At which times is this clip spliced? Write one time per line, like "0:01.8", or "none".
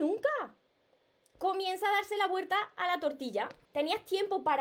0:03.6